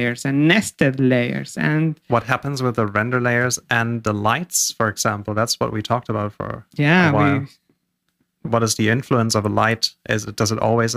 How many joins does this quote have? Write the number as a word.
one